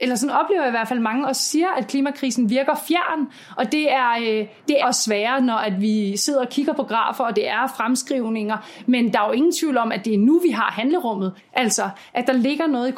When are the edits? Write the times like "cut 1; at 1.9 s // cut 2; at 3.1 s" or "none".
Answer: cut 1; at 4.8 s // cut 2; at 11.4 s